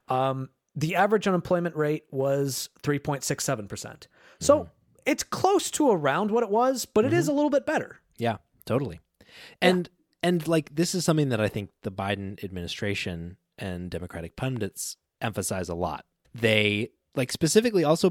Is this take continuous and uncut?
no; 1 cut; at 16.2 s

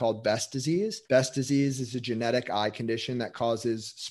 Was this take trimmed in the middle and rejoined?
yes; 1 cut; at 1.0 s

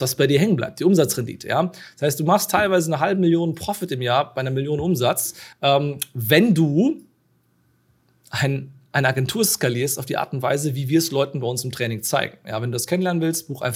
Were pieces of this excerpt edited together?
no; 0 cuts

